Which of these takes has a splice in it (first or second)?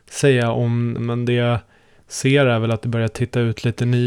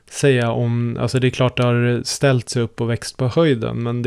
first